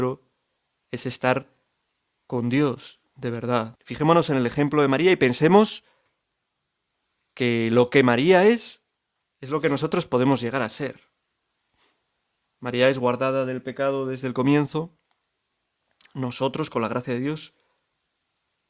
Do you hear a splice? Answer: yes; 1 cut; at 3.8 s

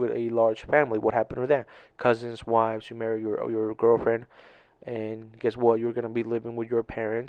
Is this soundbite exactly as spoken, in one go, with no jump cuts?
yes; 0 cuts

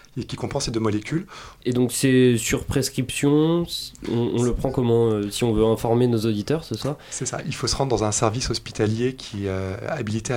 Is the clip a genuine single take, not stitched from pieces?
no; 1 cut; at 1.6 s

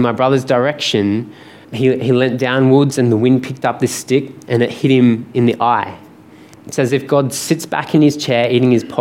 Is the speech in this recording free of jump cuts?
no; 2 cuts; at 1.6 s, 6.5 s

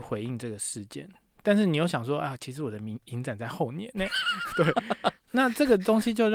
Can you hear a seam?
no; 0 cuts

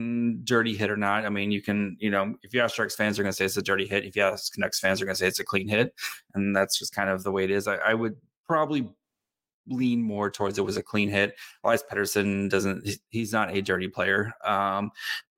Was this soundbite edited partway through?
no; 0 cuts

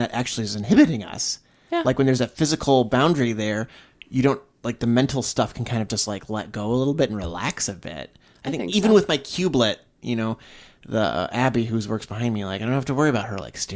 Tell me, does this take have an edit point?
no; 0 cuts

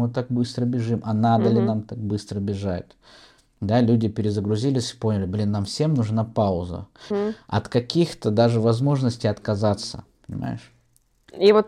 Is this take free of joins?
no; 2 cuts; at 7.1 s, 10.1 s

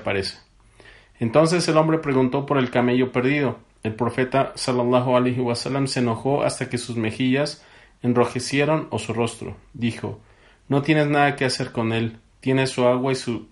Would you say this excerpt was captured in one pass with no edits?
yes; 0 cuts

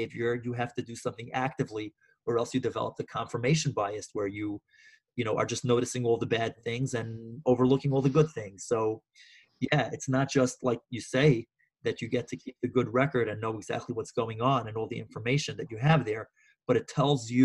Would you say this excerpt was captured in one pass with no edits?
yes; 0 cuts

